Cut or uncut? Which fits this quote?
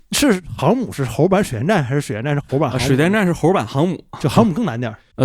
uncut